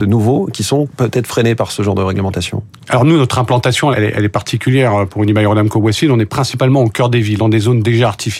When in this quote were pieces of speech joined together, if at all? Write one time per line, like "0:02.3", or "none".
0:03.9
0:07.4